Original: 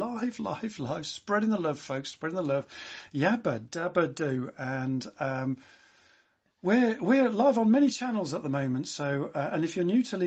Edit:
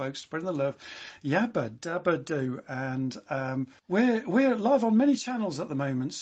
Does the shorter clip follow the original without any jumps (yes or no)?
no